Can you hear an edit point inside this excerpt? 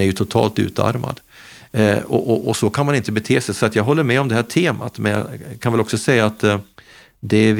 no; 0 cuts

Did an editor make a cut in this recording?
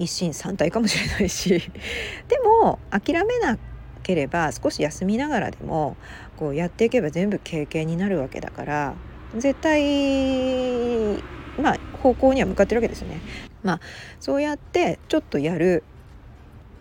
yes; 1 cut; at 13.5 s

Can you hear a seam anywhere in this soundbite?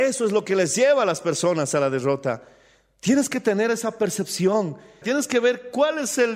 yes; 1 cut; at 5.0 s

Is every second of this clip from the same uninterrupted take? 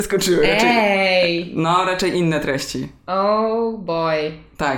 yes; 0 cuts

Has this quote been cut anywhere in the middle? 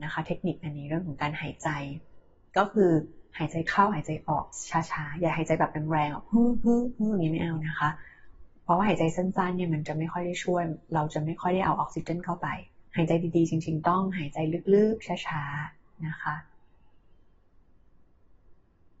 yes; 1 cut; at 12.9 s

